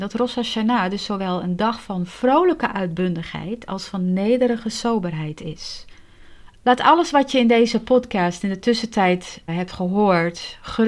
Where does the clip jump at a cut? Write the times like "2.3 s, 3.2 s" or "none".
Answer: 6.6 s, 9.5 s